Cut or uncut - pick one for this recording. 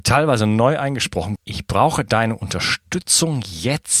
cut